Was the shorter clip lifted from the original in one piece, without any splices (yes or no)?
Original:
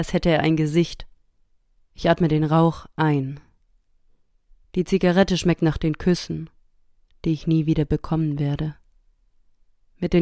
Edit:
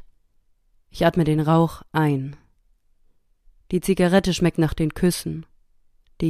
yes